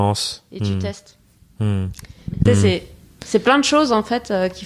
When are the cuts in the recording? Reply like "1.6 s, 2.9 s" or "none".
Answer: 2.5 s

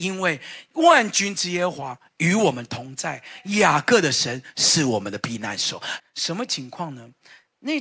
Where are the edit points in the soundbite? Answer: 6.0 s

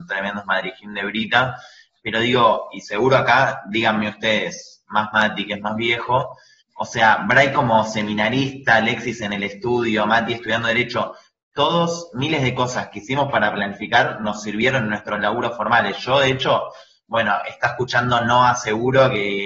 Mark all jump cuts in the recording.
6.7 s

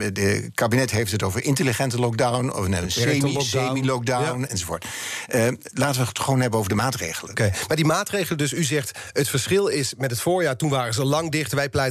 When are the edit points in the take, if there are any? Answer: none

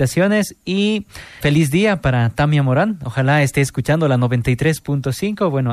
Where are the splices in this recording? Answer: 1.4 s

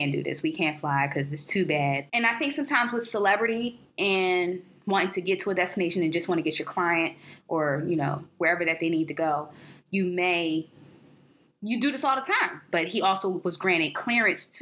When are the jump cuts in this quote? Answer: 2.1 s, 12.7 s

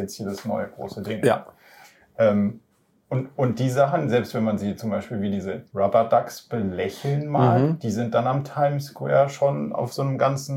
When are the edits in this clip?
5.7 s

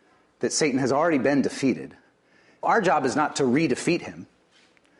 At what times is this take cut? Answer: 2.6 s

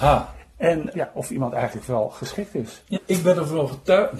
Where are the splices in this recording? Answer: 0.9 s, 2.9 s

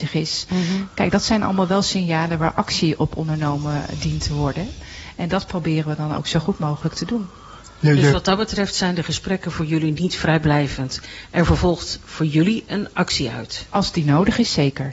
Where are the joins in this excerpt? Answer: none

